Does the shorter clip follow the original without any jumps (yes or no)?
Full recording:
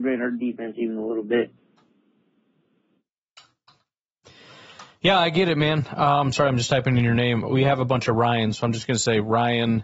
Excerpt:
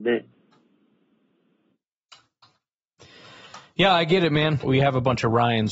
no